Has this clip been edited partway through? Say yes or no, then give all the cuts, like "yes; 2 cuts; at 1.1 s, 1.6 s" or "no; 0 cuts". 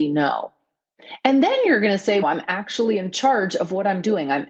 yes; 1 cut; at 2.2 s